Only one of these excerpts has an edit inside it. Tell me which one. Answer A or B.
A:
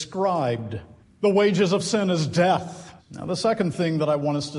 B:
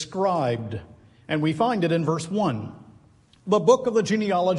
A